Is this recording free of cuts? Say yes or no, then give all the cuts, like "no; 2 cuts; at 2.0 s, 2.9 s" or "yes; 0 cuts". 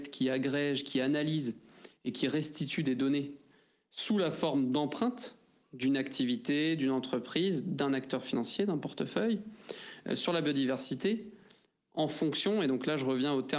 yes; 0 cuts